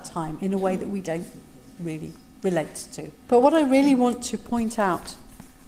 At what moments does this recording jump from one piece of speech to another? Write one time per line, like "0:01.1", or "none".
0:03.3